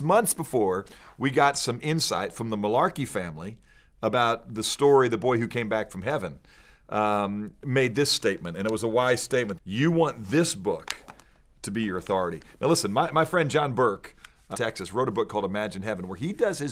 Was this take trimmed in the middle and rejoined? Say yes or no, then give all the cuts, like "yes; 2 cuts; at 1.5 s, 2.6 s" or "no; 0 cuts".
yes; 2 cuts; at 9.6 s, 14.5 s